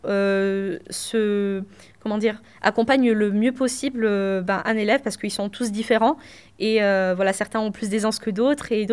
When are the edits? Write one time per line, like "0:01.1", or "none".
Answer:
none